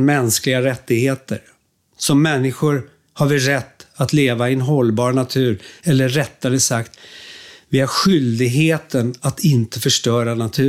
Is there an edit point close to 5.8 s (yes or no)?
no